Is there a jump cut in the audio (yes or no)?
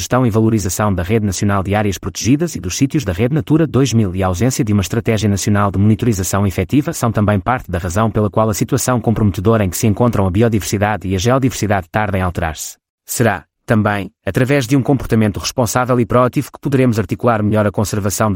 yes